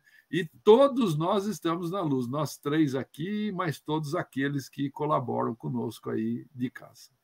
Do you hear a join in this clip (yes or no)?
no